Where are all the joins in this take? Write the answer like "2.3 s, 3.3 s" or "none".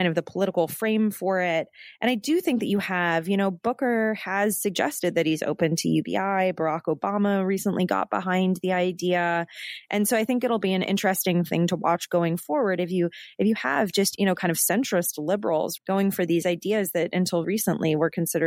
14.2 s, 15.8 s, 17.4 s